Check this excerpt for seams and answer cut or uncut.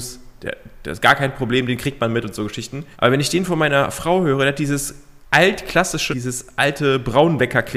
cut